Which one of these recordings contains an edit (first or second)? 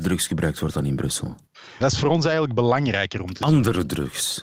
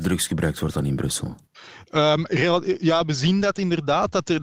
first